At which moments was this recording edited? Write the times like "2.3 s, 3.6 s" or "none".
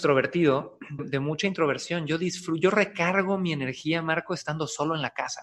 1.0 s